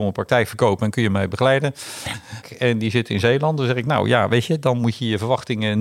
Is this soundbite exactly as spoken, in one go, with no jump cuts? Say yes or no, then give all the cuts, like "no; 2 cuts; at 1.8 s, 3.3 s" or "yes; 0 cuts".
no; 1 cut; at 2.4 s